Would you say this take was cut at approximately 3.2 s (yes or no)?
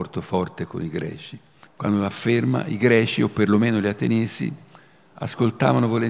no